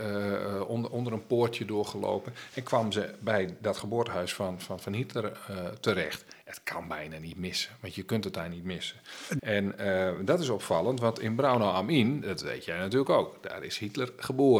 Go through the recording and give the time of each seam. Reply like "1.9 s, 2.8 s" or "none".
9.4 s